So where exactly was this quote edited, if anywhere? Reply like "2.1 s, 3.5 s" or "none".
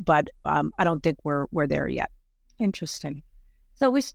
none